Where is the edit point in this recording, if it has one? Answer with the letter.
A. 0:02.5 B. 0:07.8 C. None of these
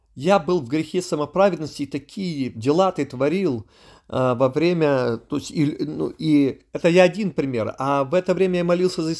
A